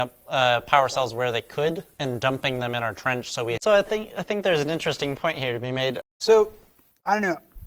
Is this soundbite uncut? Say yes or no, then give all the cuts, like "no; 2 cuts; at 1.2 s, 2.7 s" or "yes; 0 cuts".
no; 2 cuts; at 3.6 s, 6.0 s